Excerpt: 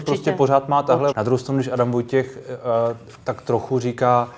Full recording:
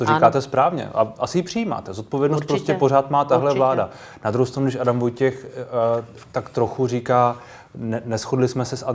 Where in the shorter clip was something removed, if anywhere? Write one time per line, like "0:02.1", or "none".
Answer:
0:01.1

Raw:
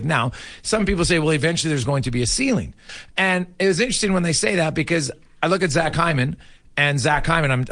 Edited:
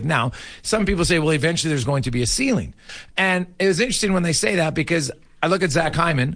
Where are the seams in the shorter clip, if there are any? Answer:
none

